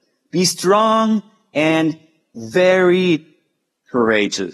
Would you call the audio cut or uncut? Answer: uncut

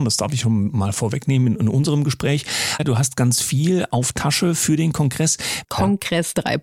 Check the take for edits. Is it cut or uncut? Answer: cut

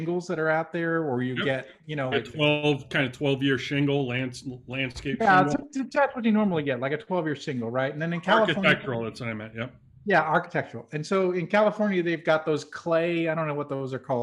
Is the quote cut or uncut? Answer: cut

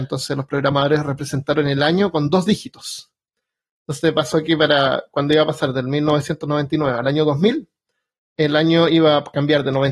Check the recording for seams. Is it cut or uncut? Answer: uncut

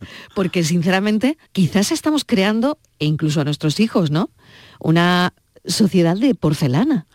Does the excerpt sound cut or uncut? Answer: cut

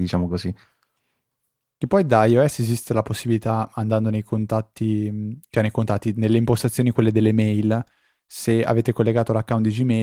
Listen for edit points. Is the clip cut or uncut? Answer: uncut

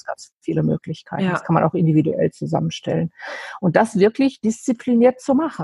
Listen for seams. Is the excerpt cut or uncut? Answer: uncut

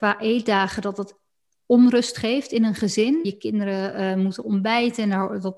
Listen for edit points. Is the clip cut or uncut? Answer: cut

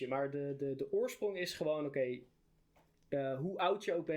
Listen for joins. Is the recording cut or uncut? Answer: uncut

